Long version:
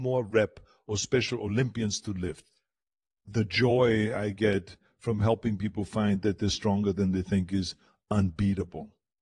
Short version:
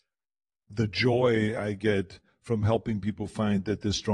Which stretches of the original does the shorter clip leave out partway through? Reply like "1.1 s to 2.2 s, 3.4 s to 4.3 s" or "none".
none